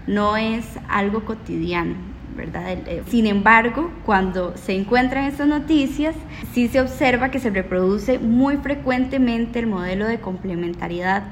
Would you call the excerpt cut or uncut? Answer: cut